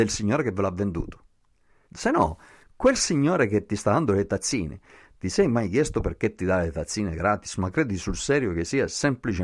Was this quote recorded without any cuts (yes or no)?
no